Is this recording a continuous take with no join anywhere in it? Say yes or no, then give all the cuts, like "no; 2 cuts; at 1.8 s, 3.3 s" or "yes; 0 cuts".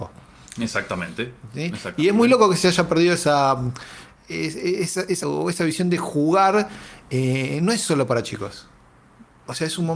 no; 2 cuts; at 4.1 s, 5.2 s